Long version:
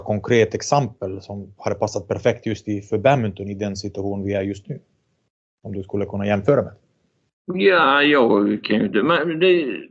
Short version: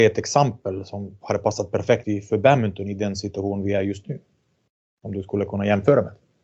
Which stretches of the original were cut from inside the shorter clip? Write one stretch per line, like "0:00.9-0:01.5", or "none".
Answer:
0:02.4-0:02.6

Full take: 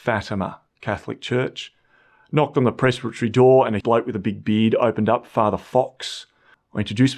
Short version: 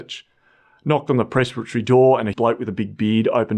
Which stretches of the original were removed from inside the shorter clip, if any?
none

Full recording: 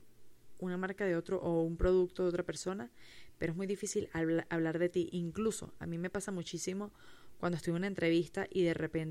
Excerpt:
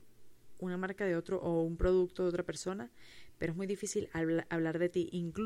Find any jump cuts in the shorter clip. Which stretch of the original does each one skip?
none

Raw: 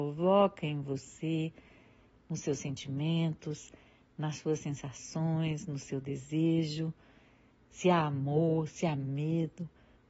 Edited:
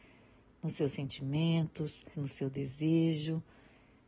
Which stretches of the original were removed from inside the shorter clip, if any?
0:03.8-0:05.7

